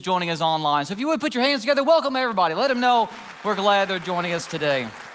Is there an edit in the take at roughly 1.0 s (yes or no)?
no